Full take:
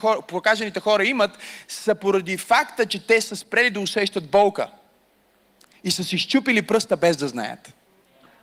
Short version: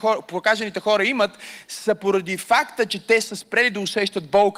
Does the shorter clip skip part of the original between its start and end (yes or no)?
no